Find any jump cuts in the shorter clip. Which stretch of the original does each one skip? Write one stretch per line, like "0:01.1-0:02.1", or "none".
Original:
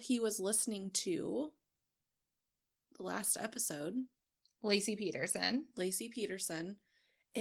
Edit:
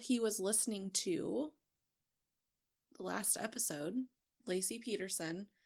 0:04.4-0:05.7